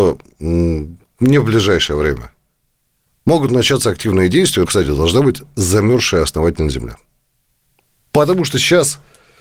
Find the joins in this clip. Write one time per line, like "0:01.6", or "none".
0:04.7